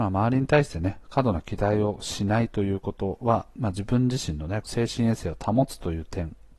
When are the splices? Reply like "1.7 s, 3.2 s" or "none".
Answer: 4.6 s